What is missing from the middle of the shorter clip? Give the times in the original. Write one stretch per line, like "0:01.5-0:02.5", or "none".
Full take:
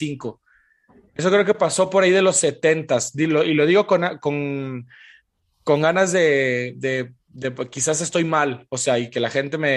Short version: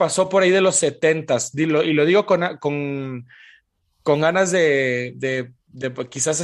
none